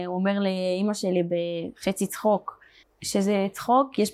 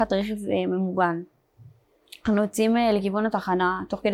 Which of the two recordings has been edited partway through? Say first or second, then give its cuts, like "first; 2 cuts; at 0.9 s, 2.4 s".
first; 1 cut; at 2.8 s